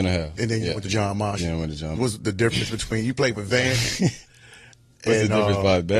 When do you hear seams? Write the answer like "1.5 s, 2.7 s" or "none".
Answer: 2.0 s